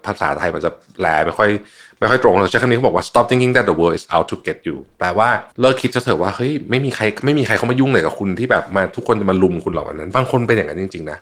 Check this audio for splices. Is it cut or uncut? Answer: cut